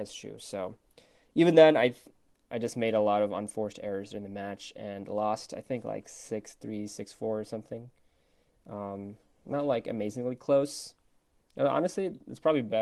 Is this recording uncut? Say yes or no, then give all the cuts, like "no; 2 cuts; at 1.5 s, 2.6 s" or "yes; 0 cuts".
yes; 0 cuts